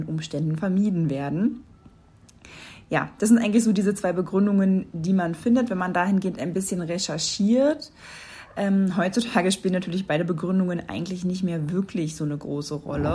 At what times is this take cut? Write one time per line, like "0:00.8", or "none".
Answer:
none